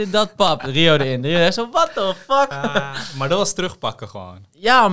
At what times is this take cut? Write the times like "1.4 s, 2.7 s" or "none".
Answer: none